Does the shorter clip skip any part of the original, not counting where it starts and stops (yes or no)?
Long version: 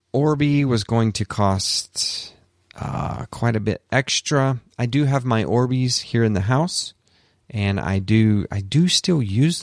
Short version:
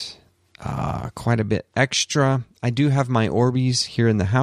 no